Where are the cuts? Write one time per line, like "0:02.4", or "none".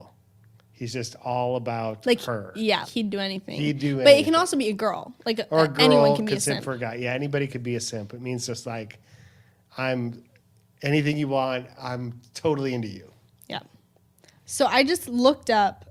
0:02.8

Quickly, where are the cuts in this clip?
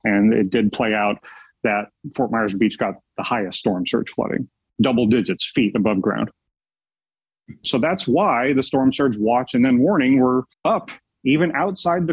0:07.6
0:10.5

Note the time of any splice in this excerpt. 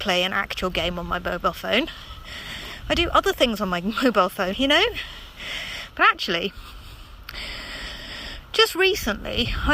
0:04.5
0:05.9

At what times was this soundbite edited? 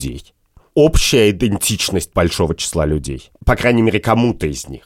0:03.4

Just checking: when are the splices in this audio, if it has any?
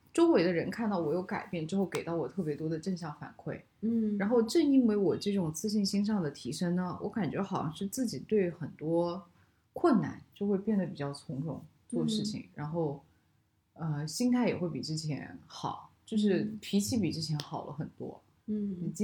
none

